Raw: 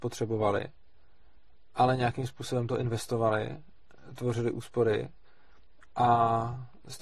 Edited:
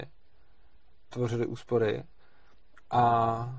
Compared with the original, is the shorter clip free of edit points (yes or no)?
no